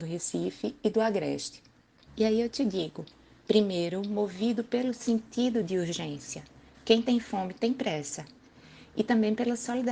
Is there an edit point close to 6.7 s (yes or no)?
no